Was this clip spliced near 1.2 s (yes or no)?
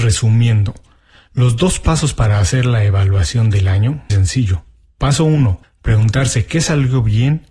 no